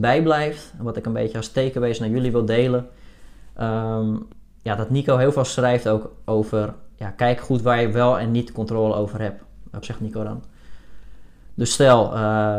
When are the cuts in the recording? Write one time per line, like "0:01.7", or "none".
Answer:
0:09.8